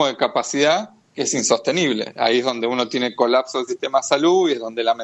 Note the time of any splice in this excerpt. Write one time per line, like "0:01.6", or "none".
none